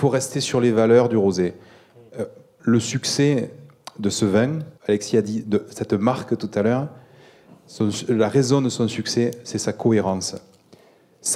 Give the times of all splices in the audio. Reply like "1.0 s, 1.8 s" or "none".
2.6 s, 4.8 s